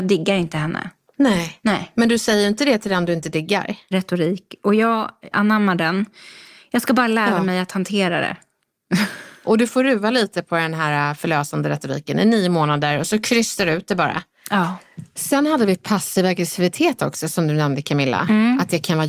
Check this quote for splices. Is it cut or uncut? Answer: cut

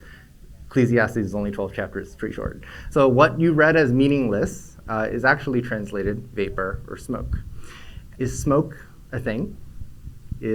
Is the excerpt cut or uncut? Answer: cut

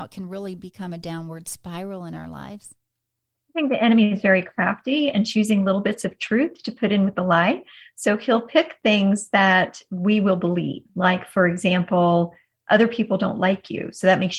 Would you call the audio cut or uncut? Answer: cut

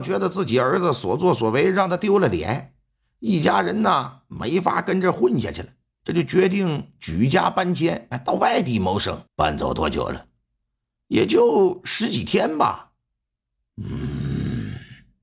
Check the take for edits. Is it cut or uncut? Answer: cut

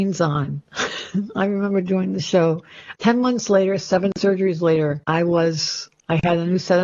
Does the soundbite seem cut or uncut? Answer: cut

